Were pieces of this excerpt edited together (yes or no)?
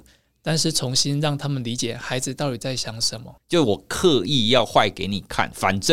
yes